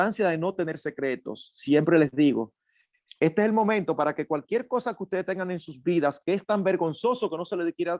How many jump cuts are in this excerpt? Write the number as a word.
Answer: zero